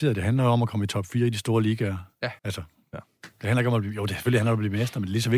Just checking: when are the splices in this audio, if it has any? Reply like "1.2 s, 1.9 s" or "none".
2.4 s